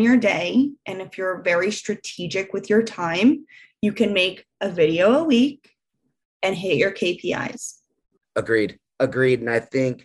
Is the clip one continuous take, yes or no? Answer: yes